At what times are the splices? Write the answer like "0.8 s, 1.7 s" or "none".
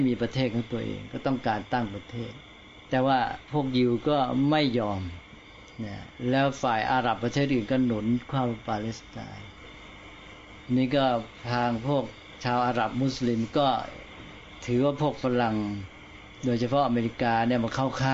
2.8 s